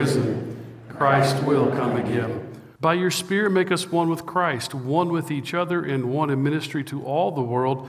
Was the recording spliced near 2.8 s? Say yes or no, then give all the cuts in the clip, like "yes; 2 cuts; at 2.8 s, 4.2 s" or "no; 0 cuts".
yes; 1 cut; at 2.8 s